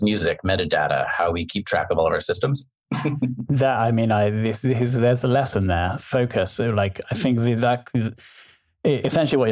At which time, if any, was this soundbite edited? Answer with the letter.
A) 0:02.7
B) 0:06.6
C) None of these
A